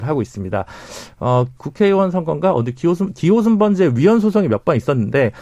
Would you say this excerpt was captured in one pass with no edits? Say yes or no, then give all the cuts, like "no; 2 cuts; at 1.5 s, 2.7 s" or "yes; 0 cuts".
yes; 0 cuts